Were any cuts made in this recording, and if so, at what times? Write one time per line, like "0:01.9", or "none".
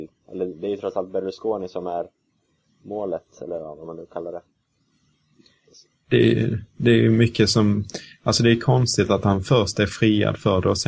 none